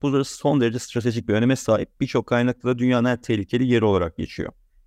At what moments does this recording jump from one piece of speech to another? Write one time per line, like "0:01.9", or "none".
none